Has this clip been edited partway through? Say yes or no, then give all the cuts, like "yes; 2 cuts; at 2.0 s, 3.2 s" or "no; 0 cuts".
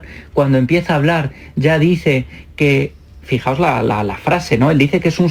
no; 0 cuts